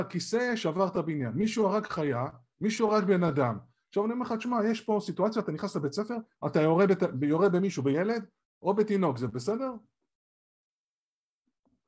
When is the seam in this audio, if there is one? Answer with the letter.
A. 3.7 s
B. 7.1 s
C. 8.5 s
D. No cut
D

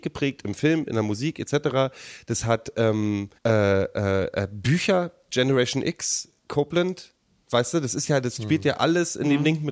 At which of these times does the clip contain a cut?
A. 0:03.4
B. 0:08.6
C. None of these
A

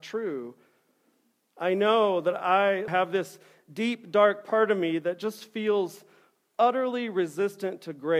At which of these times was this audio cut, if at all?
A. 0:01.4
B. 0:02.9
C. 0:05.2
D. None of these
B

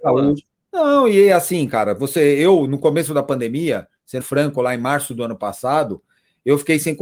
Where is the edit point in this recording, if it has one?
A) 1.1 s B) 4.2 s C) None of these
B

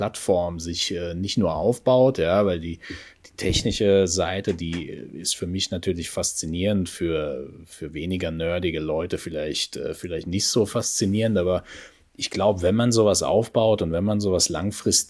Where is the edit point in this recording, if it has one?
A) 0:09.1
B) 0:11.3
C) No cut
C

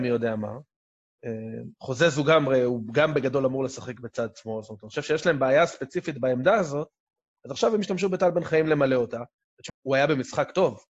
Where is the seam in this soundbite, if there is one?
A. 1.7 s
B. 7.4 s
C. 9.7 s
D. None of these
C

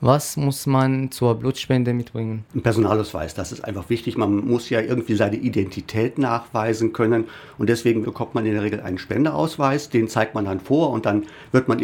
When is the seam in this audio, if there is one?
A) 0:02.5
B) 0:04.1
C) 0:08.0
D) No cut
C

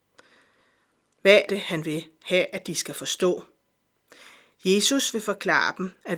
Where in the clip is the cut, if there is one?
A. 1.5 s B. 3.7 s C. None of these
A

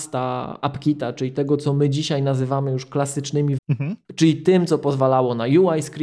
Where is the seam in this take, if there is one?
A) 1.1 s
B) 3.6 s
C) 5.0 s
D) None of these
B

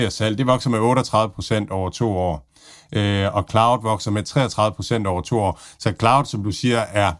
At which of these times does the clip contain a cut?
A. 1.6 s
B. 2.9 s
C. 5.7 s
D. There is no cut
D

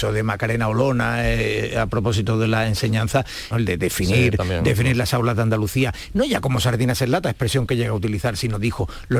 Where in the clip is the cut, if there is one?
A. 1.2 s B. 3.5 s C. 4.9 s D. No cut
B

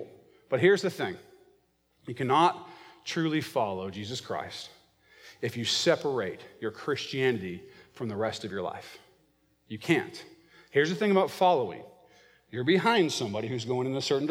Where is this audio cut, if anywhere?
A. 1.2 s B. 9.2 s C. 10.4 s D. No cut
D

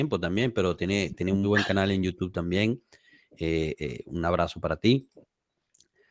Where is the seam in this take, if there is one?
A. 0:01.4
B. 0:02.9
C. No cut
A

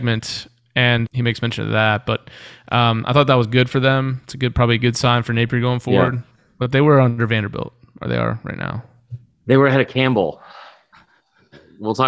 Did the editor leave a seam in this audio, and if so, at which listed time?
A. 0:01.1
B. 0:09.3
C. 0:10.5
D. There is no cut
A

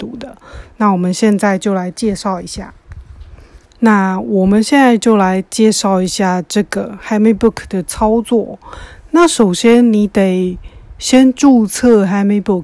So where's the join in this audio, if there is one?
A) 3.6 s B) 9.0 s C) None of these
A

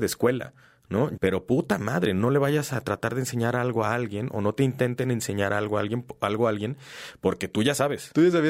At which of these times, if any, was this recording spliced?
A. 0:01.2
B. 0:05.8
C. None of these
A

